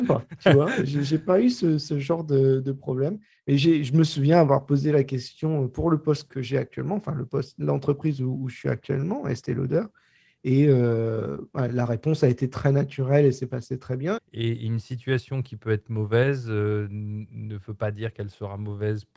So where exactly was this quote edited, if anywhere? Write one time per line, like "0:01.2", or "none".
0:06.3
0:14.2